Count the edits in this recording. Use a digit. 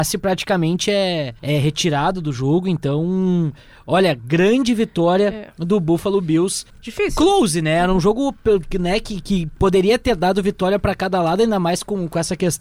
2